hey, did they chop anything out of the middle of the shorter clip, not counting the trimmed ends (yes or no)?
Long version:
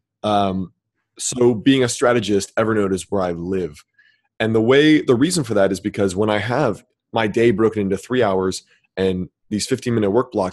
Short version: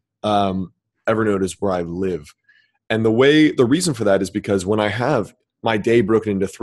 yes